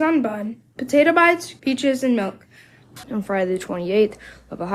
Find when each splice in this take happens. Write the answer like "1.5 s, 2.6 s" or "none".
1.6 s, 3.0 s